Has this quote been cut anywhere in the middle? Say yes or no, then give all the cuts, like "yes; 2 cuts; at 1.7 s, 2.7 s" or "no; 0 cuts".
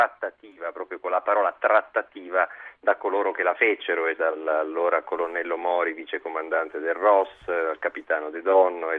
yes; 1 cut; at 4.2 s